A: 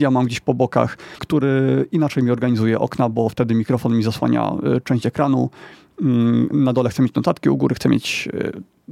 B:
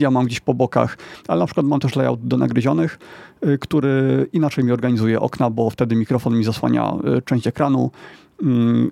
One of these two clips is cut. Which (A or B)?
A